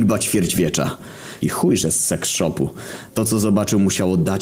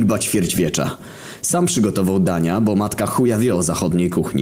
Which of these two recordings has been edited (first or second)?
first